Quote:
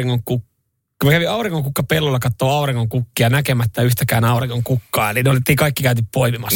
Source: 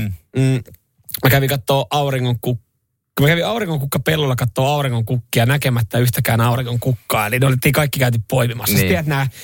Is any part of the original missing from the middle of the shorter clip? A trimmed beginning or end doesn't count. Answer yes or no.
no